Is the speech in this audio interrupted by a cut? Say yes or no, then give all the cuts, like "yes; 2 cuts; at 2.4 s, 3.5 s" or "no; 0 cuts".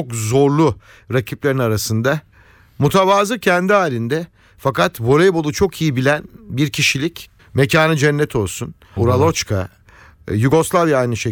yes; 2 cuts; at 7.4 s, 9.0 s